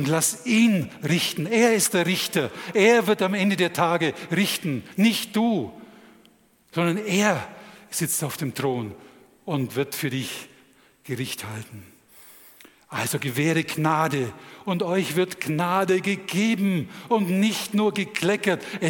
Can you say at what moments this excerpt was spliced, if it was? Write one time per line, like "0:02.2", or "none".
none